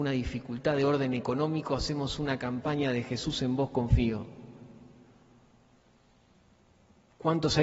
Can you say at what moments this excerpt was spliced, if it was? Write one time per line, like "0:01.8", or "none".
none